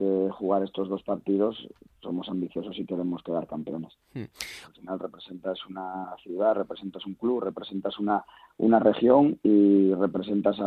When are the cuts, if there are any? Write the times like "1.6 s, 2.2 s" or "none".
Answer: 4.7 s

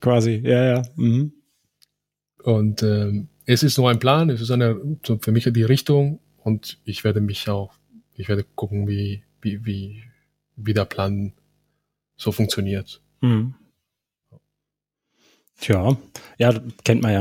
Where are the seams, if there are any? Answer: none

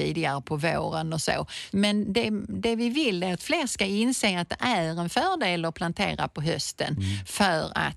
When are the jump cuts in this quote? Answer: 1.7 s

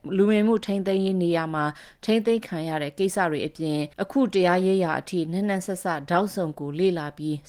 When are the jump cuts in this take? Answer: 3.9 s

